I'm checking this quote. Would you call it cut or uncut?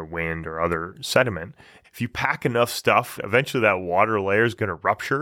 cut